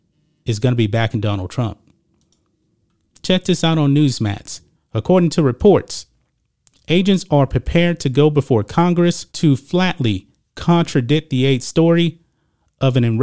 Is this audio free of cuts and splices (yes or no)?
no